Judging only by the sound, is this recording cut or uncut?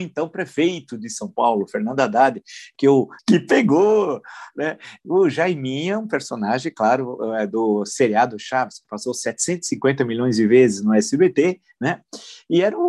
cut